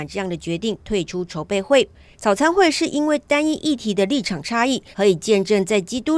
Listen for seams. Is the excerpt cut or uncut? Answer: cut